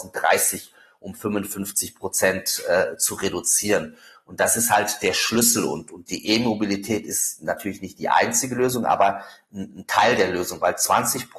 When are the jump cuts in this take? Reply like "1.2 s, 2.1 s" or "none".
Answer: none